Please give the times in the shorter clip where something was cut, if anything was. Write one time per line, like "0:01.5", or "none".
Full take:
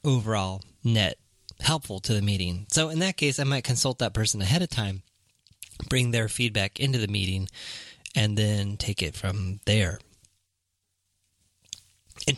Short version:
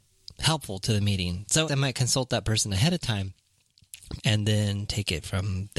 0:01.7
0:04.2